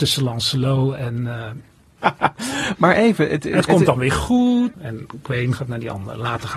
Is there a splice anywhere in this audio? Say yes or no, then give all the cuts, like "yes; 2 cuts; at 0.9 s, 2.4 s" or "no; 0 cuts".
yes; 2 cuts; at 2.0 s, 4.7 s